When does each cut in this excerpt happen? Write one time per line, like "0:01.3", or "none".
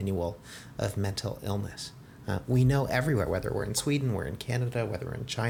none